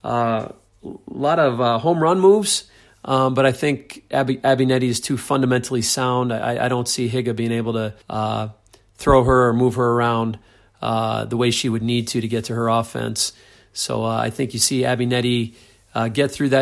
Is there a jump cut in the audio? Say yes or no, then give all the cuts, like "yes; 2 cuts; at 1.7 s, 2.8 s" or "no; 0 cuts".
yes; 1 cut; at 8.0 s